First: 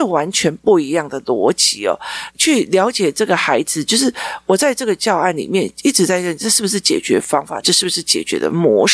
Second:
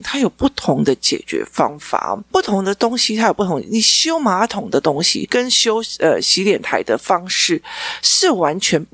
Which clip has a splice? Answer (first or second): first